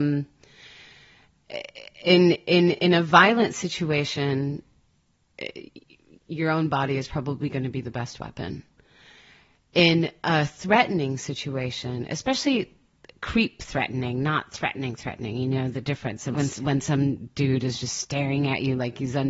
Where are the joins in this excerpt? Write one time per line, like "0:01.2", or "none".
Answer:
0:16.3